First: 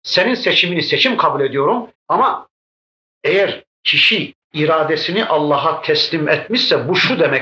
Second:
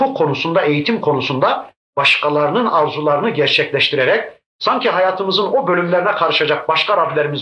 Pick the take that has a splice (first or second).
first